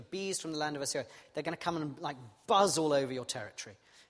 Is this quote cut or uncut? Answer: uncut